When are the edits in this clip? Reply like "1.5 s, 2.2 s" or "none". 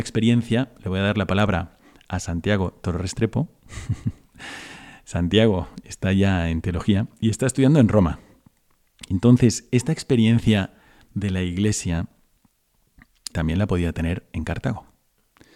13.3 s